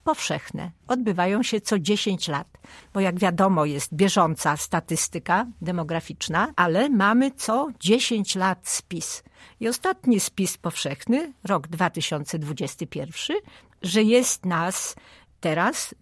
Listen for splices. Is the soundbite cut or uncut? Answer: cut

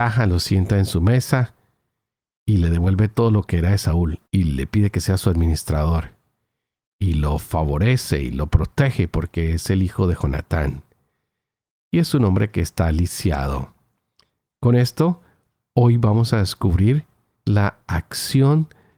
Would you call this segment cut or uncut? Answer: cut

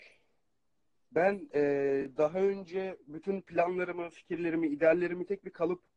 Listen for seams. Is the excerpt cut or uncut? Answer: uncut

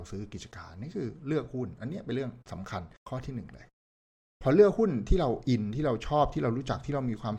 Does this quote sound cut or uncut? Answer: cut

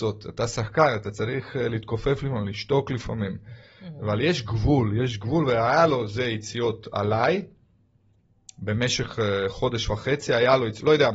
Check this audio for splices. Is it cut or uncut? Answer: uncut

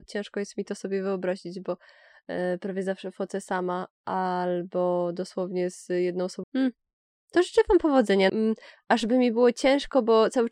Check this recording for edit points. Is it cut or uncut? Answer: cut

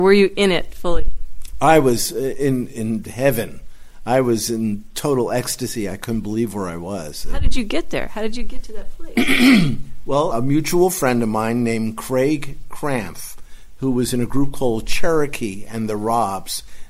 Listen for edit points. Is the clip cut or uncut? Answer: cut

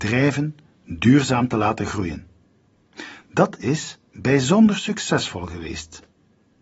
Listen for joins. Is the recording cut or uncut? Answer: uncut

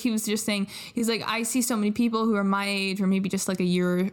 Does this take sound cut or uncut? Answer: uncut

